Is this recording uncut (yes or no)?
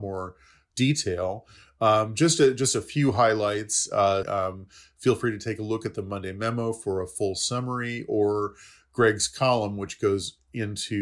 no